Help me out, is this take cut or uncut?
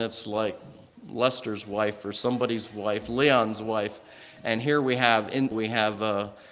cut